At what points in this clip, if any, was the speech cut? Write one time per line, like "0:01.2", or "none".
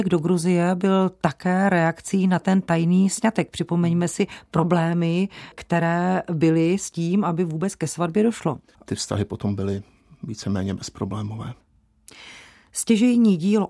0:08.7